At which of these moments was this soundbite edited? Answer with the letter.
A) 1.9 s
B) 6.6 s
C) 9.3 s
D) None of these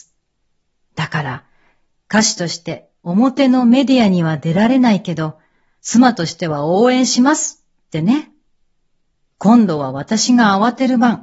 C